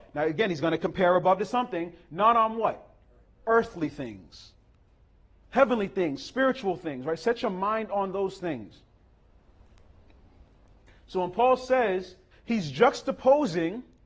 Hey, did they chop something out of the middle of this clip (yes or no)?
yes